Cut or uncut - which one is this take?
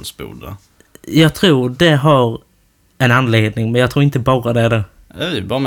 uncut